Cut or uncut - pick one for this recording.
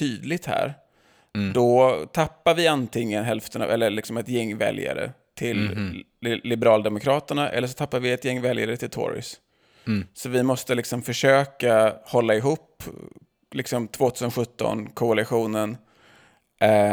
uncut